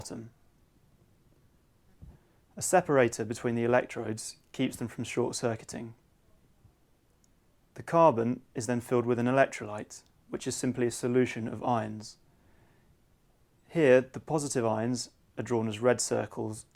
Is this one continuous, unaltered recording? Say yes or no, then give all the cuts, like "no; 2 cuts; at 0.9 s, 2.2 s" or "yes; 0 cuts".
yes; 0 cuts